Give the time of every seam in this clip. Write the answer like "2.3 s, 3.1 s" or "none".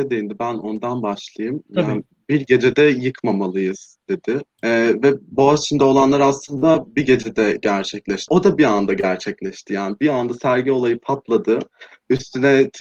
4.5 s, 8.3 s